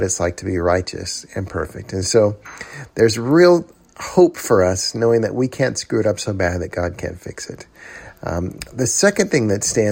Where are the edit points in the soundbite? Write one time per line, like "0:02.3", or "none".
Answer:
none

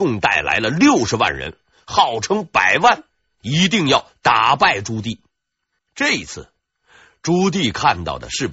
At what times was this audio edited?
0:05.8

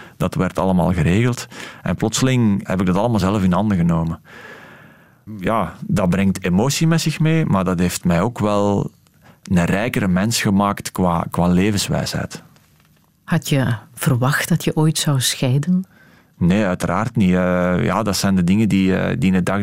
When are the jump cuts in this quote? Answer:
0:11.3

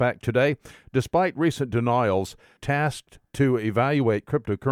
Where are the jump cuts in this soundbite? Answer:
0:02.6

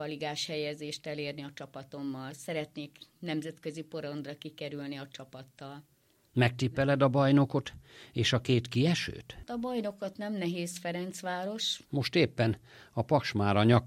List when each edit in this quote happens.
none

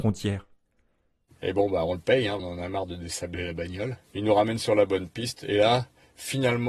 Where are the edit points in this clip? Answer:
0:01.3
0:02.4
0:04.0

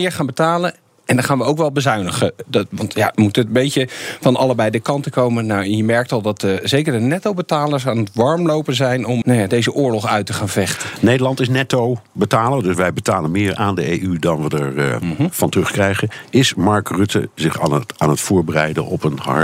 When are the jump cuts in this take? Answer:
0:09.2

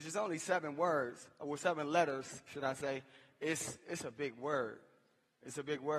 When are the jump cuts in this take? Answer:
none

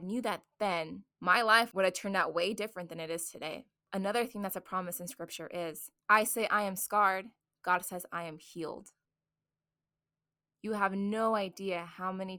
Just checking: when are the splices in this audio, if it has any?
0:01.1
0:06.0

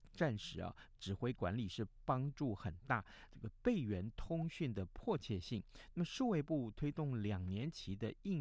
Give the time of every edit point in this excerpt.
0:01.0
0:03.3

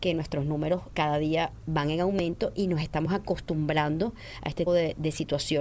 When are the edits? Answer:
0:00.9
0:04.7

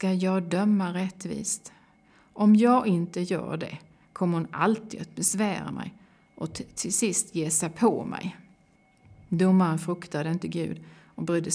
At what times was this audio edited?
none

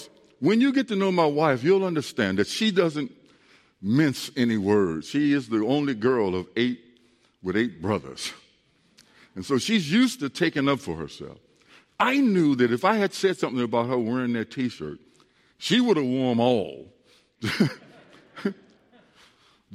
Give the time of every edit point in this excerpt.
none

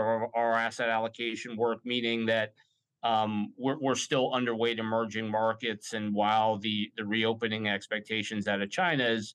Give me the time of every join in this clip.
none

